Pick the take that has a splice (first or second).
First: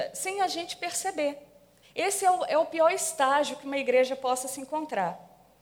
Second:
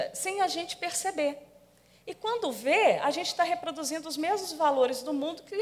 first